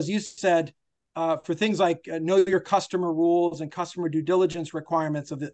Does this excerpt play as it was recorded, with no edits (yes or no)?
yes